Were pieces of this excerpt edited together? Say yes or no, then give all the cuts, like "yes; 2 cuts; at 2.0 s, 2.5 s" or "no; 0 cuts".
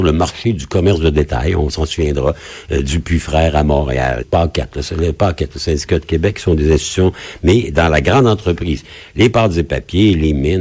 yes; 1 cut; at 4.2 s